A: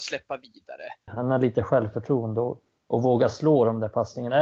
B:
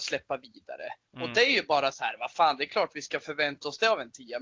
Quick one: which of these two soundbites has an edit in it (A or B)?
A